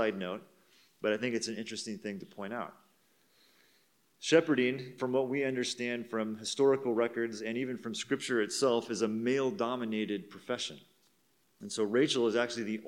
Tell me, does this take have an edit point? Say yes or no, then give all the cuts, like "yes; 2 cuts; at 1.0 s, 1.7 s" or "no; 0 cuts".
no; 0 cuts